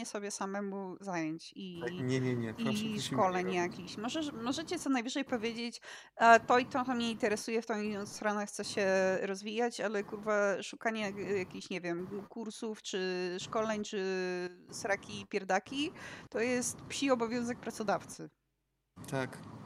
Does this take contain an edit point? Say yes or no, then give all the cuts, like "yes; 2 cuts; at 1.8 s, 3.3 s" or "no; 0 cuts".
no; 0 cuts